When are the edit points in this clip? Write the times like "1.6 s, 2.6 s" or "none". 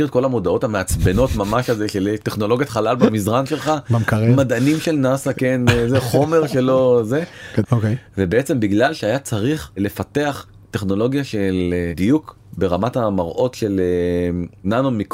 7.6 s